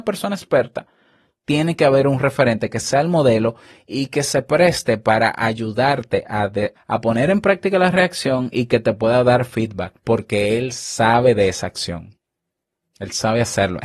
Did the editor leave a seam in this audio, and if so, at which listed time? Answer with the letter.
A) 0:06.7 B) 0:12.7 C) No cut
A